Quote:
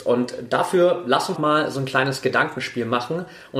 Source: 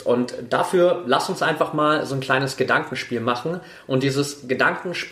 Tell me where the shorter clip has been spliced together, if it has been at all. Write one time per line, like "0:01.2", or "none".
0:01.4